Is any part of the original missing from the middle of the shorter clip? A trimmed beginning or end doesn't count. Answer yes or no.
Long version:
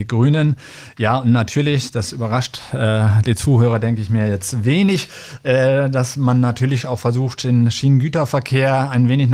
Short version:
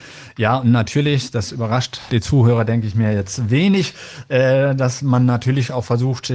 yes